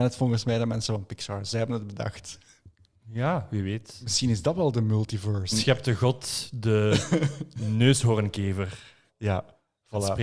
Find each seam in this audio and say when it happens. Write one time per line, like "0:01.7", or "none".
0:05.5
0:09.1